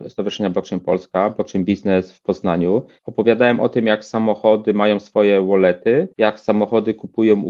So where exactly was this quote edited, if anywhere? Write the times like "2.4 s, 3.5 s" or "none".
3.0 s, 6.1 s